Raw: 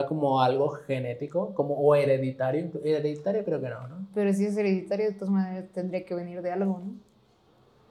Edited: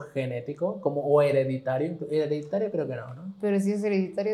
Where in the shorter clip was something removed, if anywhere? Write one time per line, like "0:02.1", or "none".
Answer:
none